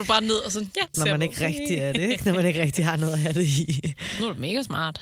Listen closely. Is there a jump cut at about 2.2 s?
no; 1 cut; at 0.9 s

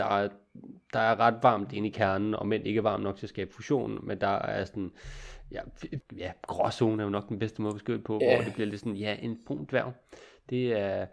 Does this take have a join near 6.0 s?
yes; 1 cut; at 6.0 s

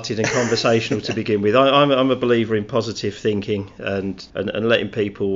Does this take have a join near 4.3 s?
yes; 1 cut; at 4.3 s

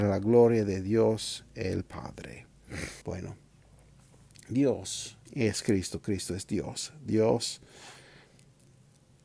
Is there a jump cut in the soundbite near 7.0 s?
no; 2 cuts; at 3.0 s, 5.3 s

